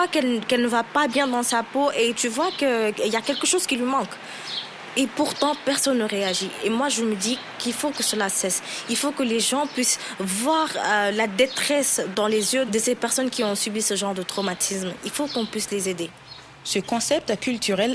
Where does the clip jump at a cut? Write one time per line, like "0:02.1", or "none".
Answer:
0:03.0

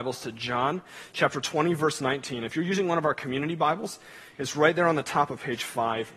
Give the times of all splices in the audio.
none

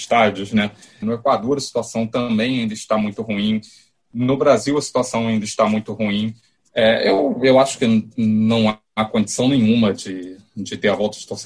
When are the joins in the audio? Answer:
0:01.0
0:06.6

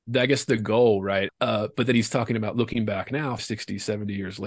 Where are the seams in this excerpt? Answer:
0:01.3
0:03.4

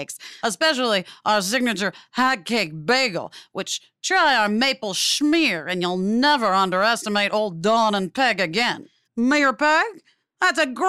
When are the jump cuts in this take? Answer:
0:09.0

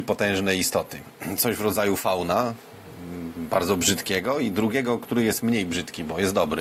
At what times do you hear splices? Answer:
none

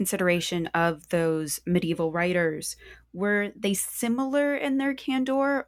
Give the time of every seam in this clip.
none

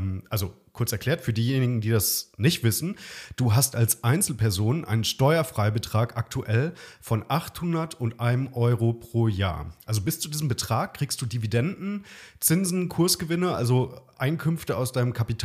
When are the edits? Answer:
none

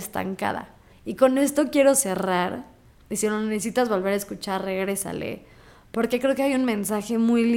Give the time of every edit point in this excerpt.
0:00.9

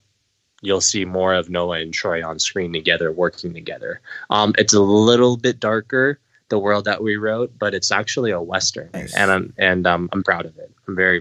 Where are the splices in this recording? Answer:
0:08.9
0:10.2

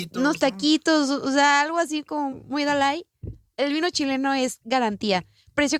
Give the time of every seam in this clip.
0:02.3

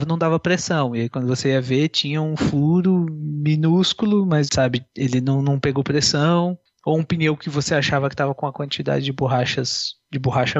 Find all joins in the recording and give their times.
0:04.5

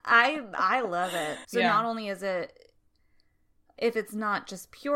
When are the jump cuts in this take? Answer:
0:01.4

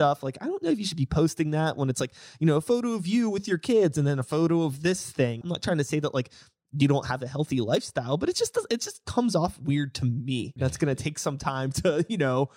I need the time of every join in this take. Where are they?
0:05.4
0:10.6

